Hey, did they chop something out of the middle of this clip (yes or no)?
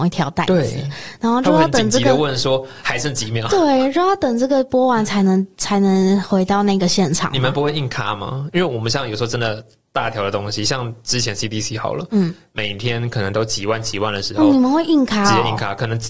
yes